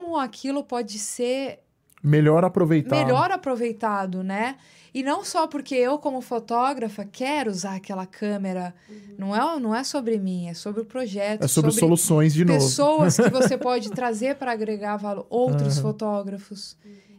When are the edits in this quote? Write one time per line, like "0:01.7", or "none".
none